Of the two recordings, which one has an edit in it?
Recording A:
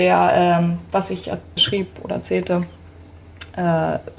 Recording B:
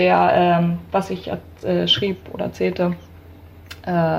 A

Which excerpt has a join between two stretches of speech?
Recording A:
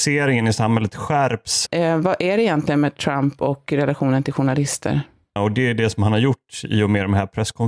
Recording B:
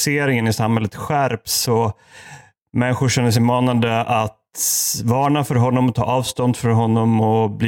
A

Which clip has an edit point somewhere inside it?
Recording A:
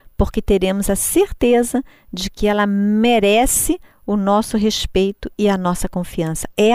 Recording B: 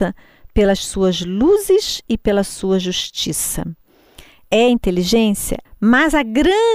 B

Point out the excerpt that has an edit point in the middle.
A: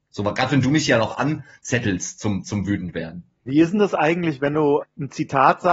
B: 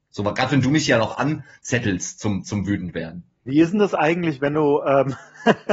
A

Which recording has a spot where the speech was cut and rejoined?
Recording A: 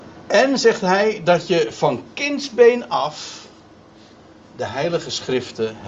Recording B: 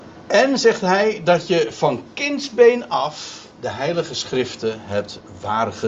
B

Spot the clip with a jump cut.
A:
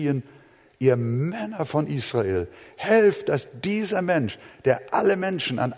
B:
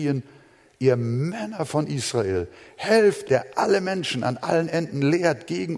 B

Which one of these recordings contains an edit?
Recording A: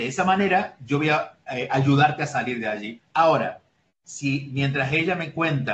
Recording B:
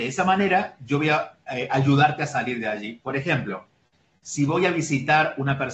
A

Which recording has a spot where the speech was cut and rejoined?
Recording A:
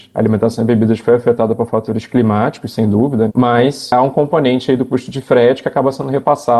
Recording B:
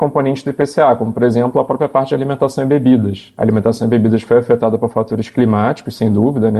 A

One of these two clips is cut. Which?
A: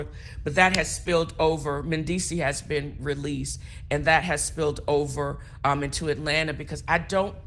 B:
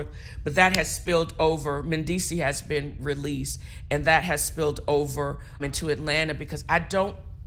B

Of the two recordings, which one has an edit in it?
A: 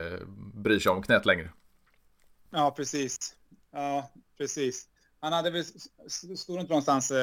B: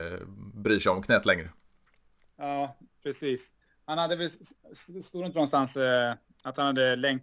B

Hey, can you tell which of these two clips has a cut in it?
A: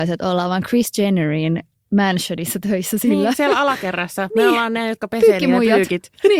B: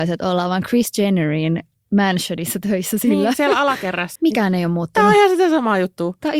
B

